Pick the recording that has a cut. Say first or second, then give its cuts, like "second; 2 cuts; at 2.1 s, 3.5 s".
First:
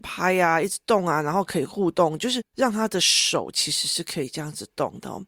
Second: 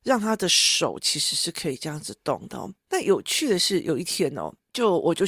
second; 1 cut; at 2.8 s